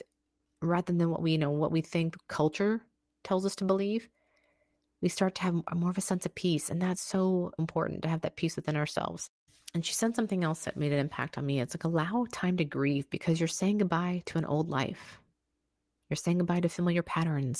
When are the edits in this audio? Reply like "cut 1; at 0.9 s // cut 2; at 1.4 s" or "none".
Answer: cut 1; at 7.6 s